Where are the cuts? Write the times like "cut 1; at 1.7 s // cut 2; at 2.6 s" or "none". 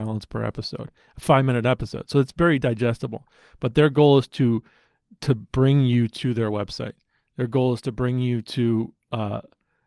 none